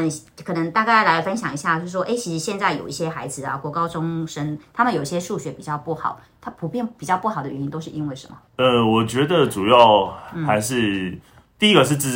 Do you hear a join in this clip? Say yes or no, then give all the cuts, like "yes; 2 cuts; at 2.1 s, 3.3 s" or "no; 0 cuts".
yes; 1 cut; at 8.5 s